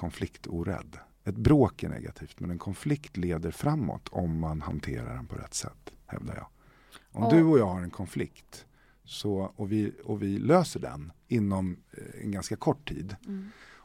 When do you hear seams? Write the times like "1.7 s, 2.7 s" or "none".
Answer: 1.1 s, 6.0 s